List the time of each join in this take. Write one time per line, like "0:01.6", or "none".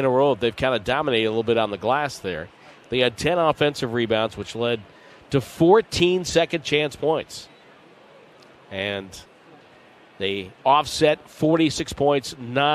none